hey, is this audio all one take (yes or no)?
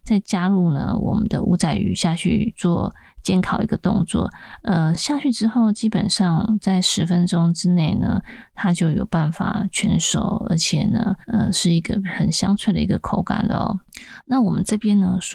yes